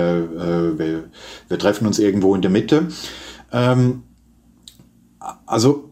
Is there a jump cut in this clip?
no; 0 cuts

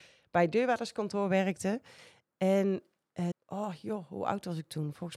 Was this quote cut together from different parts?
yes; 1 cut; at 3.3 s

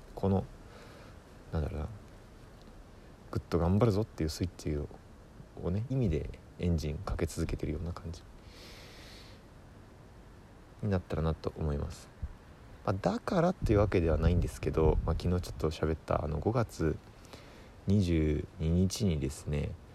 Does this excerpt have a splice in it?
yes; 1 cut; at 5.9 s

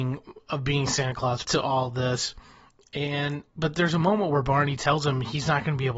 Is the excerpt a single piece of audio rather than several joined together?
no; 2 cuts; at 1.4 s, 3.5 s

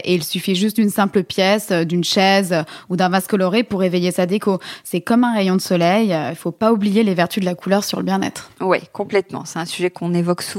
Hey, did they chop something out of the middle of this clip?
no; 0 cuts

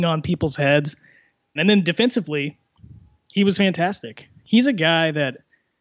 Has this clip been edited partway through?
yes; 1 cut; at 1.6 s

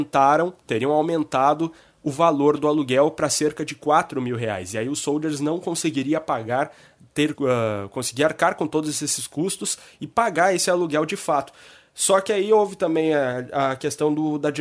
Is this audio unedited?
yes; 0 cuts

